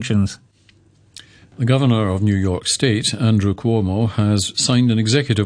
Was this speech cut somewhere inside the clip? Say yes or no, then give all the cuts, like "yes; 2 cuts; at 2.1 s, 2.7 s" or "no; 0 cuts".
no; 0 cuts